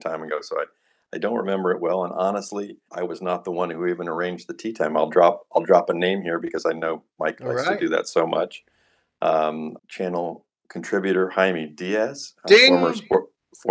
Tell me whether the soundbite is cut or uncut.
cut